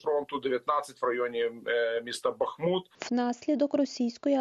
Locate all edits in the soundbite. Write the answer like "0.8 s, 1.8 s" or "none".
none